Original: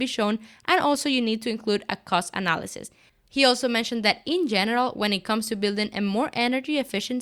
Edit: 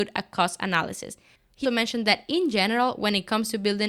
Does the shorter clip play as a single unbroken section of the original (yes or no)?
no